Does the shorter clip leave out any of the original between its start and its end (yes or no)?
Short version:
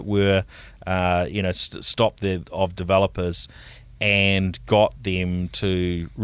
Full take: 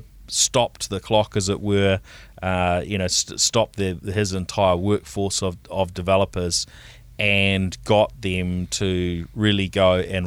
yes